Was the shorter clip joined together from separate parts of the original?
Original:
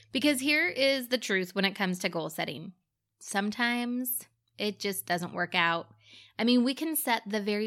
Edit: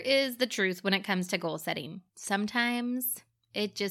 yes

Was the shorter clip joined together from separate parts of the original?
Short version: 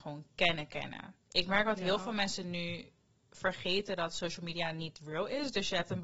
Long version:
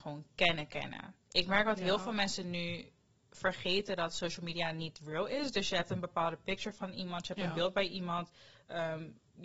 no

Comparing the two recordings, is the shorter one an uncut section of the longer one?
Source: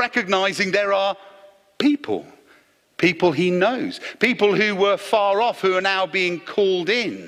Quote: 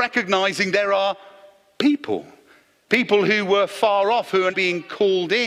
no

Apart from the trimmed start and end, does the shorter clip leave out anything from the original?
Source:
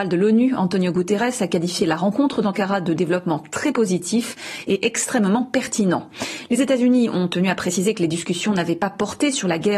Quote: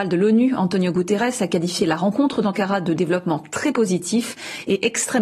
no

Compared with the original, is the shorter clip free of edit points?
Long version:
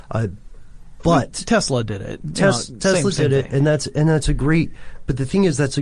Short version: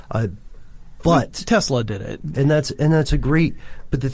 no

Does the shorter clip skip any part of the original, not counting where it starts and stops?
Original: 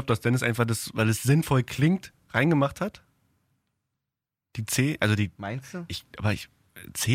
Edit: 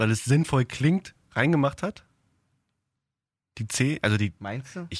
no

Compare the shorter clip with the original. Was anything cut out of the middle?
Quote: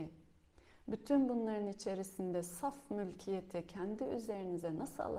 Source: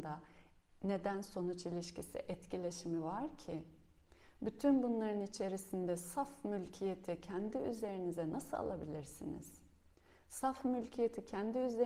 no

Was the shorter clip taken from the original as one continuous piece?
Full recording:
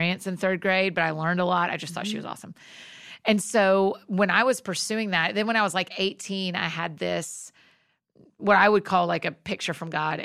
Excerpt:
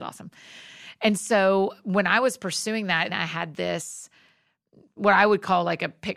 no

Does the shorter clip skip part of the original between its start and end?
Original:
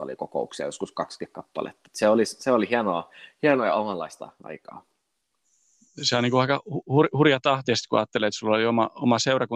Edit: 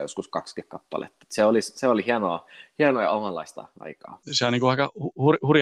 yes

